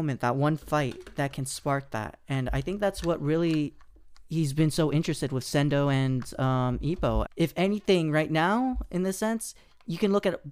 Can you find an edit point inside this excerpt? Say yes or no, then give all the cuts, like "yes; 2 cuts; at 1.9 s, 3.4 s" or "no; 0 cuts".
yes; 1 cut; at 7.2 s